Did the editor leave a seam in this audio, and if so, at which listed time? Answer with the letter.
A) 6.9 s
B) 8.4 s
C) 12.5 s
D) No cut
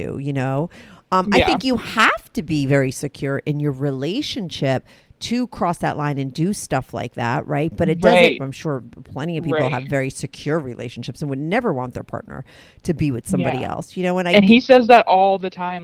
B